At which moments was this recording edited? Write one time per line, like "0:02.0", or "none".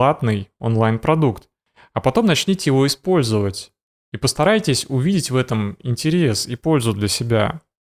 none